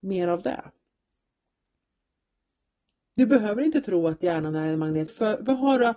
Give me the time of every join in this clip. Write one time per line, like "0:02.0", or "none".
0:05.1